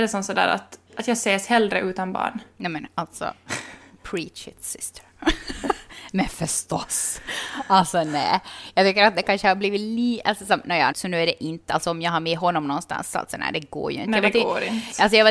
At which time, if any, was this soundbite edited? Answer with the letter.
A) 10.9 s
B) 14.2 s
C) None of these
A